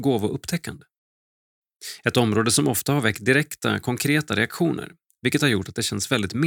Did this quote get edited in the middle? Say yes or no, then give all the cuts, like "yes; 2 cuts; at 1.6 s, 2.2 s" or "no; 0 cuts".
no; 0 cuts